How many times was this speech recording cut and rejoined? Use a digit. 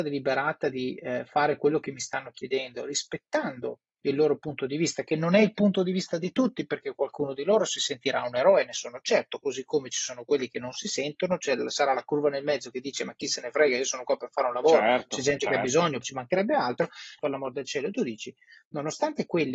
2